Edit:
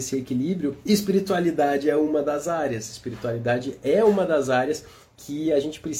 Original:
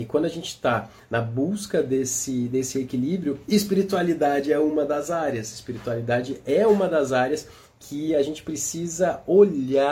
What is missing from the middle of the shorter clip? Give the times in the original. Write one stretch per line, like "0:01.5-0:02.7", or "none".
none